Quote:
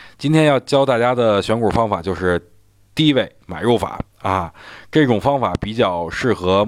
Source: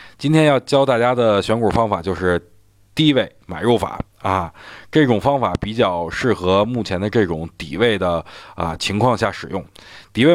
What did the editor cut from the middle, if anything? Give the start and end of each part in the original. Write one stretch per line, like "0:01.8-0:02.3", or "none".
none